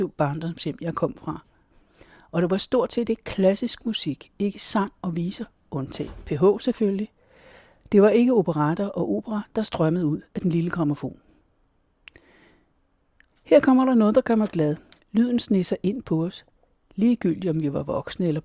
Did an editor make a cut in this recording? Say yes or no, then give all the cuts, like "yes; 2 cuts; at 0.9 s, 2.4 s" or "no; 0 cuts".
yes; 1 cut; at 15.0 s